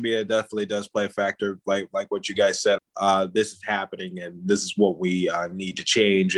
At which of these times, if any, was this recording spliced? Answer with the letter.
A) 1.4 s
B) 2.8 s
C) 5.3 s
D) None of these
B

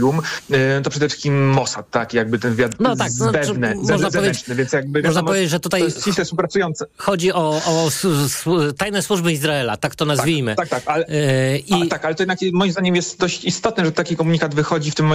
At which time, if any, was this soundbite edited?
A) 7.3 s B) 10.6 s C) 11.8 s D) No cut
D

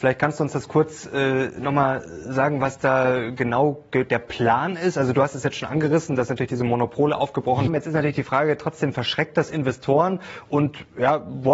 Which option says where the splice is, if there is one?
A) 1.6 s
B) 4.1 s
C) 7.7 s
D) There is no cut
C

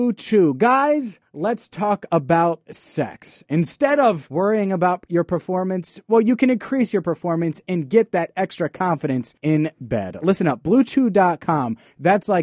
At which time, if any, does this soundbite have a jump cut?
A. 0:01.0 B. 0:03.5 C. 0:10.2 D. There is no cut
D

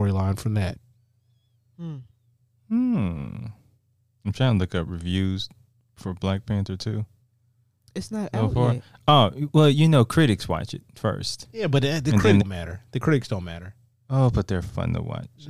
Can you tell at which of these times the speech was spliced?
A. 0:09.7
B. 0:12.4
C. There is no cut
B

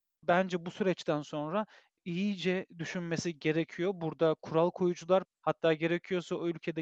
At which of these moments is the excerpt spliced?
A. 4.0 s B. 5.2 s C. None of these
B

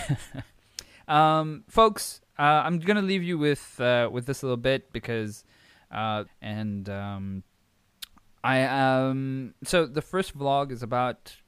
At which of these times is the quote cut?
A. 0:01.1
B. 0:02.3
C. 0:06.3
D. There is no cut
C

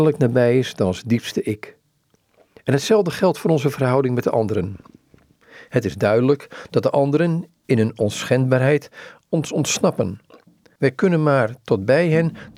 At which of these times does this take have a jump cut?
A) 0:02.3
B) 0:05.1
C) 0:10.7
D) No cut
D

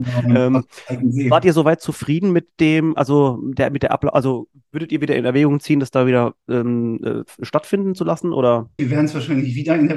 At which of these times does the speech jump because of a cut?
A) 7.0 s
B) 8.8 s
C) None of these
B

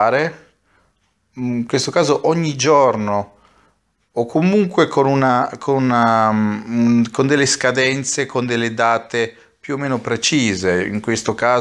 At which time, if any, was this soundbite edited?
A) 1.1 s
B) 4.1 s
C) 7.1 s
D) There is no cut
D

